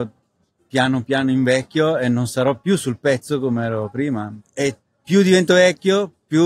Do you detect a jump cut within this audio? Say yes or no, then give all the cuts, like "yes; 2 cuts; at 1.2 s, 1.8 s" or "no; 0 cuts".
yes; 1 cut; at 4.4 s